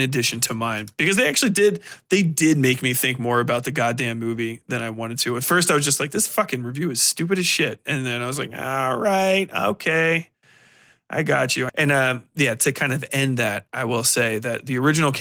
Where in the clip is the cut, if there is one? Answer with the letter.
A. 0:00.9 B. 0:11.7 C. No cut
B